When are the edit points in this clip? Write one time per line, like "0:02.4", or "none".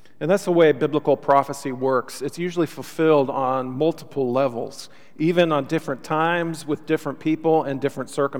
none